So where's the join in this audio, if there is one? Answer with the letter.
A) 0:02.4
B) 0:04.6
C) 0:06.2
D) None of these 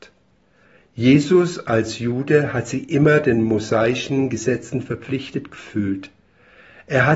D